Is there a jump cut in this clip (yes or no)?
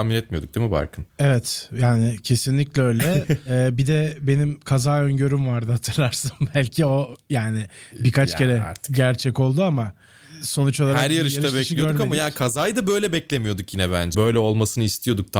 yes